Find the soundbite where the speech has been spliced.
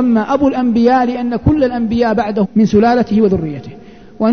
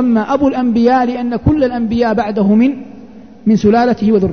first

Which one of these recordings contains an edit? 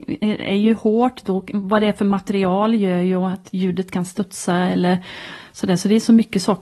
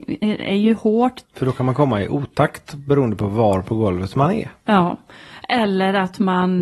second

